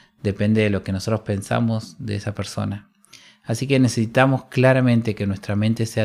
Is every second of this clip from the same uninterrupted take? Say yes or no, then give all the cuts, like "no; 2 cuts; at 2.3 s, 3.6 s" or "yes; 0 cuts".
yes; 0 cuts